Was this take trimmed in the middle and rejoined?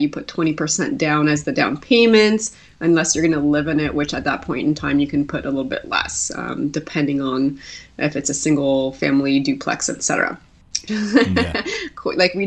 yes; 1 cut; at 10.9 s

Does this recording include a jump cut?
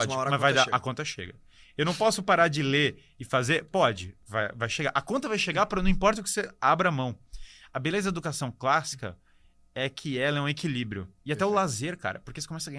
no; 0 cuts

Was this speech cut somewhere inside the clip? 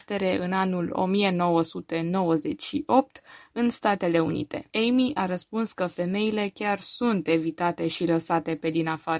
yes; 1 cut; at 4.7 s

